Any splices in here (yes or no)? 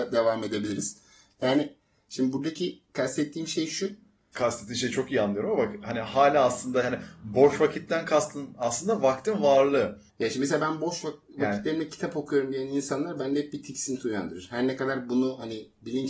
yes